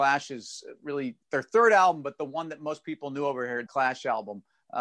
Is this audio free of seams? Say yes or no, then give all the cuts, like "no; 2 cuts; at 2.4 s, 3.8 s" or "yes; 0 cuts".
no; 2 cuts; at 1.2 s, 3.7 s